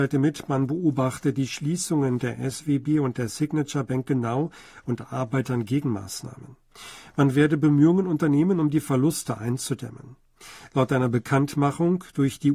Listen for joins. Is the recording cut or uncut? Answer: uncut